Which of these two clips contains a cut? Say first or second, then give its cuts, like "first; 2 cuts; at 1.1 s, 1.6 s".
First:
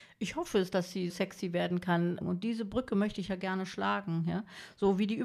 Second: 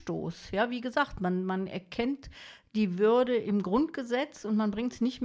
first; 2 cuts; at 1.1 s, 2.2 s